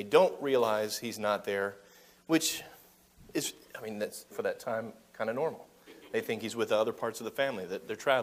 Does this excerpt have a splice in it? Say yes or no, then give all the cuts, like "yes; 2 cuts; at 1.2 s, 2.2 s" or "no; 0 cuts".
yes; 1 cut; at 4.3 s